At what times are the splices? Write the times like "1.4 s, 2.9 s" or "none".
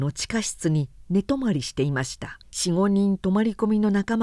2.4 s